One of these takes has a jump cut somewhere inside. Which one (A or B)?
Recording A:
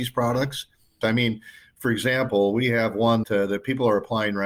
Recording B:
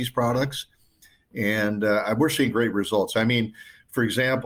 A